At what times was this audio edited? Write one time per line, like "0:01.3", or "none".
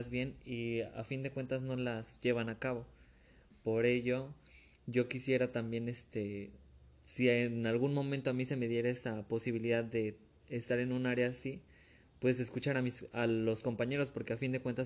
none